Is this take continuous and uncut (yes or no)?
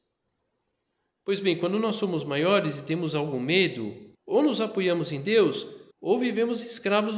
no